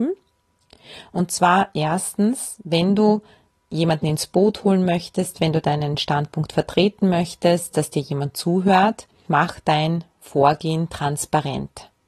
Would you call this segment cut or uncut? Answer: cut